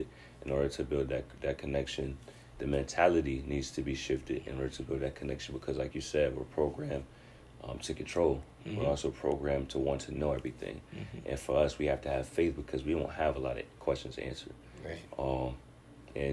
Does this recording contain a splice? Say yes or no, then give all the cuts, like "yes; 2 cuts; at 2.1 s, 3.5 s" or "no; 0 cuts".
no; 0 cuts